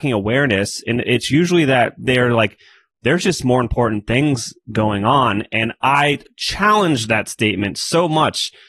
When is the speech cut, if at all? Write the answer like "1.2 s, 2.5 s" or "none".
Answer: none